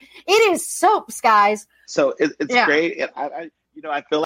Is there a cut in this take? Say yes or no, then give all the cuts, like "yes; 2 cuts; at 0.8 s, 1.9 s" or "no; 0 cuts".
yes; 1 cut; at 1.8 s